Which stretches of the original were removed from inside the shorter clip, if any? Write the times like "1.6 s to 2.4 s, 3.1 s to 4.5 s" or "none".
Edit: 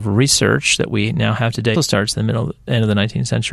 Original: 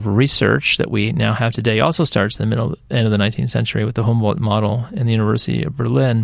1.7 s to 2.0 s